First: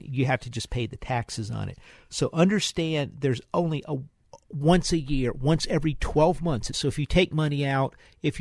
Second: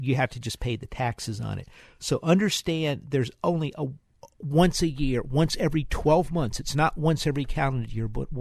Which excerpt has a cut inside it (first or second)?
first